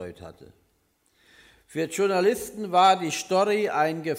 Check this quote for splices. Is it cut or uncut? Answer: uncut